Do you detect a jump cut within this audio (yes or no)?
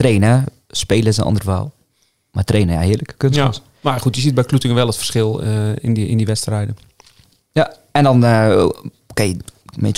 no